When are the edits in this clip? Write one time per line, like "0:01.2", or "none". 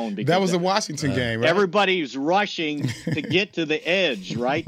none